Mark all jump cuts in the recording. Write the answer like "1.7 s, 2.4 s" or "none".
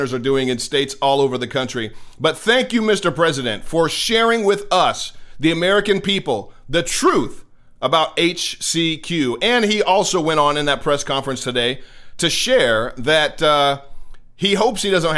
none